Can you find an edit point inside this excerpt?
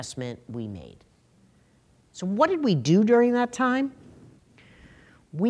no; 0 cuts

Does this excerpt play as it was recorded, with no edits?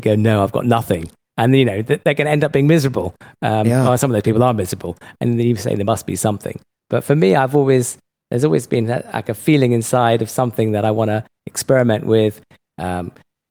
yes; 0 cuts

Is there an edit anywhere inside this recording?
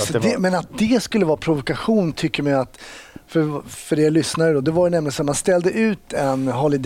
no; 0 cuts

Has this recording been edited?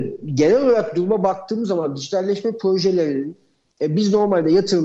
no; 0 cuts

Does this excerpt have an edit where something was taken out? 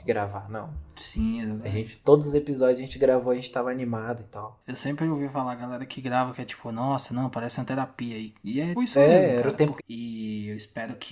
yes; 2 cuts; at 8.8 s, 9.8 s

